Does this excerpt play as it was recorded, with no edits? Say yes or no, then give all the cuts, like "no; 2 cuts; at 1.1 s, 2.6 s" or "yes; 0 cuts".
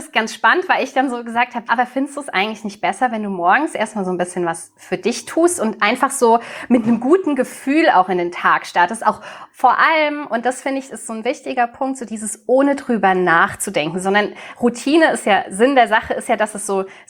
no; 1 cut; at 1.7 s